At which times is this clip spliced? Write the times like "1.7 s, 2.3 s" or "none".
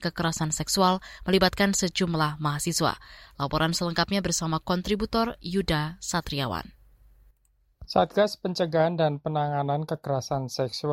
none